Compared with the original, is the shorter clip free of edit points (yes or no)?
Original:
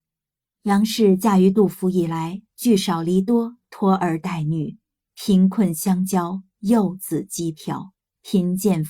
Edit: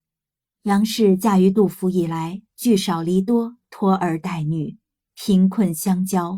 yes